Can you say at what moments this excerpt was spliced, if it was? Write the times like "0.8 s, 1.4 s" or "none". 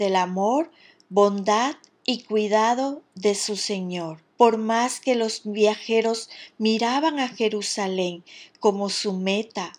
4.3 s